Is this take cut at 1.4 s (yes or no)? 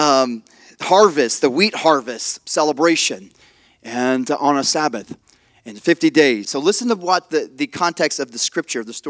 no